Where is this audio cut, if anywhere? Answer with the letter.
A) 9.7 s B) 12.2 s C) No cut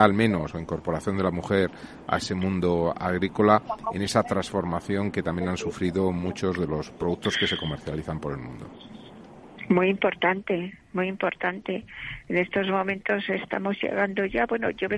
C